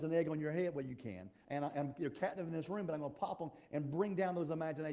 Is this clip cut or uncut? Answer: cut